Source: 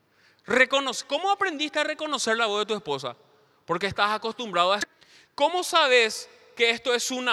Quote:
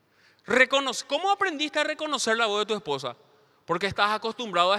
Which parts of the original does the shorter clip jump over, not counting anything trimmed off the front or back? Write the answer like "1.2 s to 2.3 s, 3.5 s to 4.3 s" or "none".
none